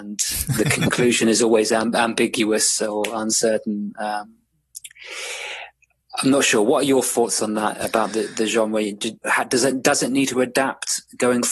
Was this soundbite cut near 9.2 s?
yes; 1 cut; at 9.2 s

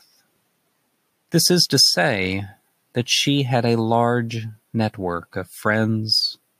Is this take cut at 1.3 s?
yes; 1 cut; at 1.3 s

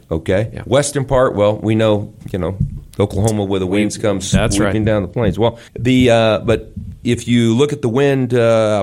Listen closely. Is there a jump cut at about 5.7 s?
yes; 2 cuts; at 2.2 s, 5.7 s

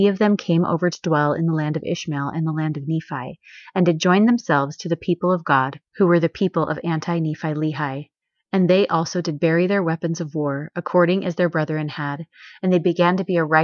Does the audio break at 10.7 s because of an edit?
no; 0 cuts

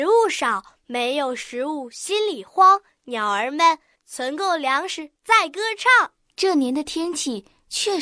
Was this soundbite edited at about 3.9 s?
yes; 1 cut; at 3.9 s

